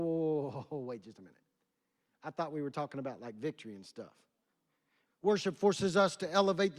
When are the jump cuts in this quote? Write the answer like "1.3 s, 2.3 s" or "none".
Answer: 5.0 s